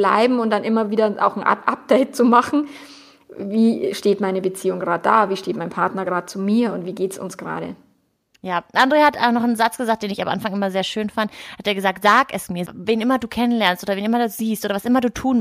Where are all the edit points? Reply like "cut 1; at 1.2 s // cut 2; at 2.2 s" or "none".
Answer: cut 1; at 12.7 s